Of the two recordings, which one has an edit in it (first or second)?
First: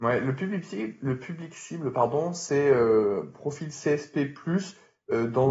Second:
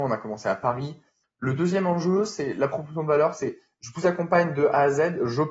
second